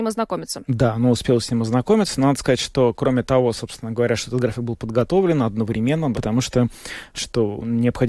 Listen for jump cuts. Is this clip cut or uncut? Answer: cut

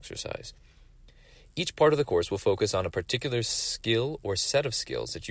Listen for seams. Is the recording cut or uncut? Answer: uncut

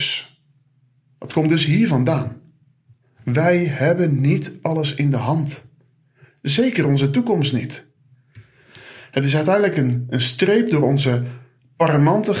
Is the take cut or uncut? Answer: uncut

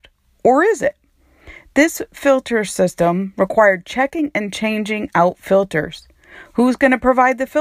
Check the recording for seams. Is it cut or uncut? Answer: uncut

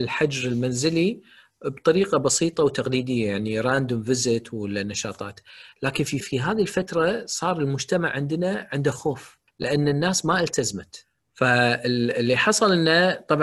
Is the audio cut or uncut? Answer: cut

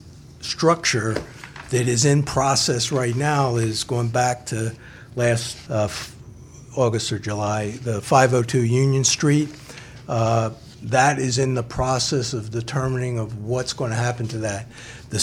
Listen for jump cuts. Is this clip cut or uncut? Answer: cut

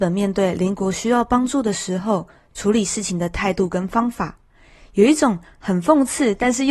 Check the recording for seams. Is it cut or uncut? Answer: uncut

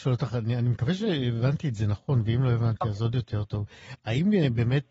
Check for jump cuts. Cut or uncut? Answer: uncut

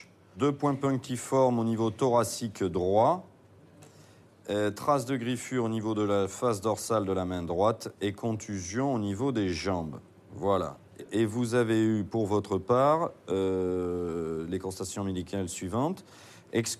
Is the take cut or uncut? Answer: uncut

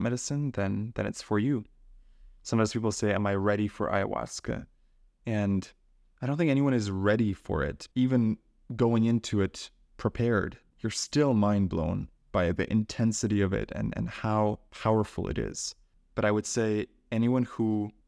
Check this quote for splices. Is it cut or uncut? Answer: uncut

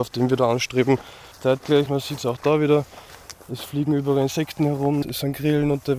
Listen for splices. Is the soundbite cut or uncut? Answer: cut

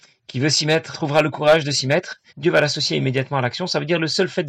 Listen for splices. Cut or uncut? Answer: cut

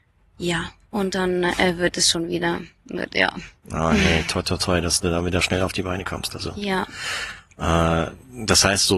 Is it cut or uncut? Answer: uncut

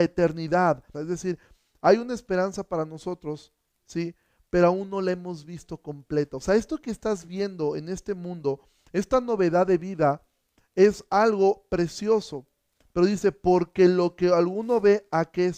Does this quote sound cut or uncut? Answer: cut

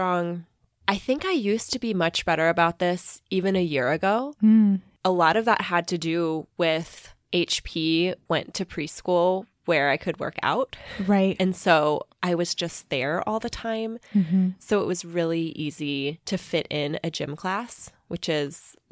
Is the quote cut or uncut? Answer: uncut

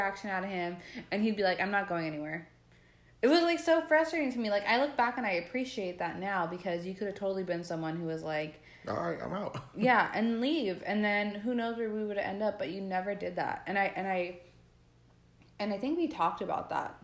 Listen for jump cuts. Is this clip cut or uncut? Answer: uncut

